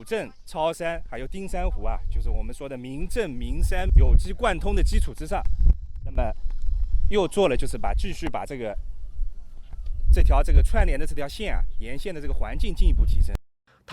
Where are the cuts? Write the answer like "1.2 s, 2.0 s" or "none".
3.9 s